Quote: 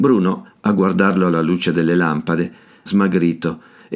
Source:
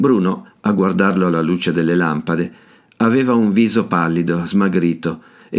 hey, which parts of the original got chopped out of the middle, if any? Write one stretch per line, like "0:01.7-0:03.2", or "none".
0:02.9-0:04.5